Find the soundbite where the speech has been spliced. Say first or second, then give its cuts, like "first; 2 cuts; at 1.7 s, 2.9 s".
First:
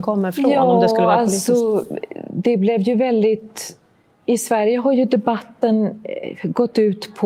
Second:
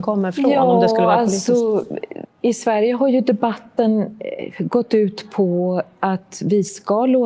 second; 1 cut; at 2.2 s